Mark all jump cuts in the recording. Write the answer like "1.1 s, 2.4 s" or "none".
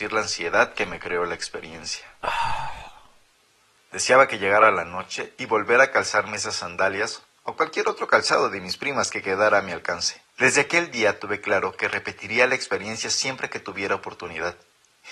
10.3 s